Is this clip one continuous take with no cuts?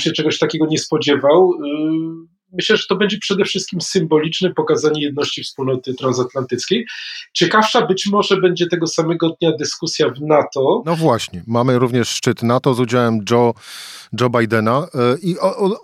yes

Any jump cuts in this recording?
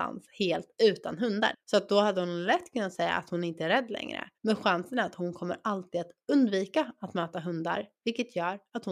yes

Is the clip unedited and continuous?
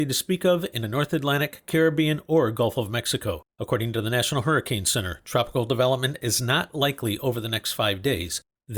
no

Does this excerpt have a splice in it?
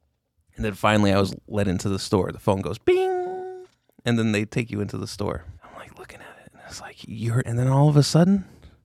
yes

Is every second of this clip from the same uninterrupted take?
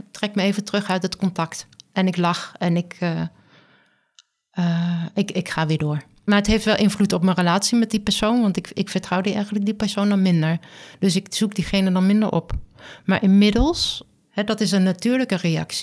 yes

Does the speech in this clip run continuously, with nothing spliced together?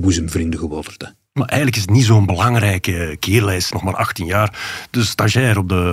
no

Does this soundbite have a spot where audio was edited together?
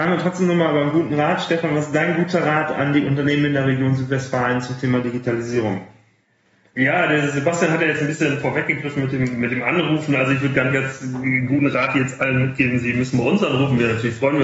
no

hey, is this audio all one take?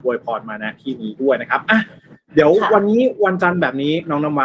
yes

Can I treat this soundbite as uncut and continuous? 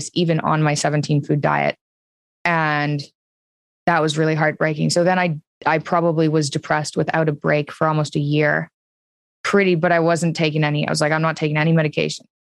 yes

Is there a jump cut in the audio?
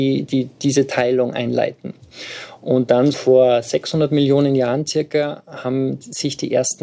yes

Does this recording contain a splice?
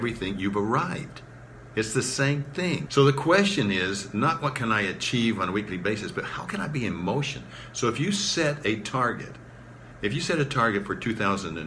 yes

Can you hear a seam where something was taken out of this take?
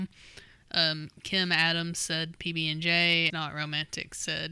yes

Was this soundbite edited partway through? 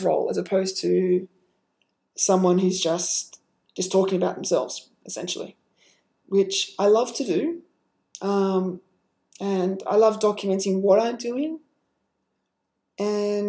no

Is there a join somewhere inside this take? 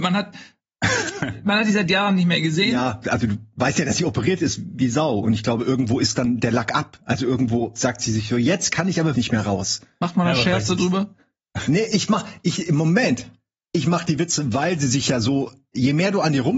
yes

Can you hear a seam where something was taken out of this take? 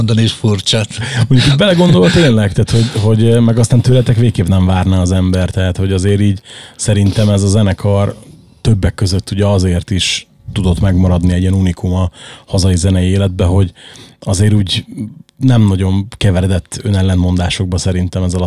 no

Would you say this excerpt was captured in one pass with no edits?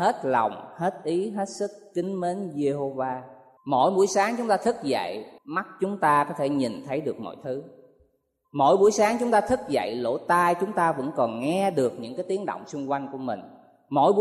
no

